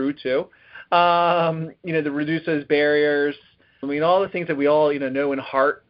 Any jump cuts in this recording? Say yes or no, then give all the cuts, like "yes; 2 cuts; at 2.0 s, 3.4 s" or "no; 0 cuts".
yes; 1 cut; at 3.8 s